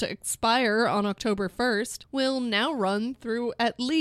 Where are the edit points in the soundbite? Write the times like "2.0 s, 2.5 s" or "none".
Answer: none